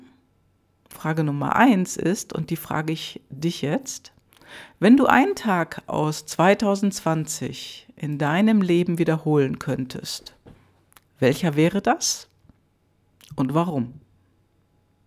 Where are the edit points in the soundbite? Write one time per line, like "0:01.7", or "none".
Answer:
none